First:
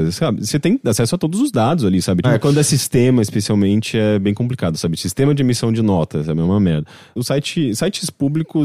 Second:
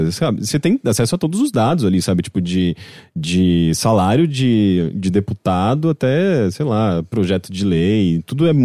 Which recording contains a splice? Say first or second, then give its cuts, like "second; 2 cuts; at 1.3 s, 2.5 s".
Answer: first; 2 cuts; at 2.2 s, 7.2 s